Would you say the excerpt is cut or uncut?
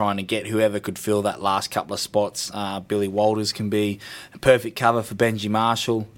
uncut